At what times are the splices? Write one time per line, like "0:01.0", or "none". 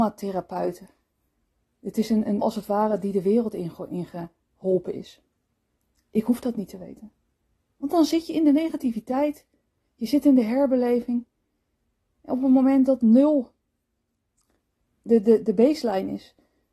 0:02.4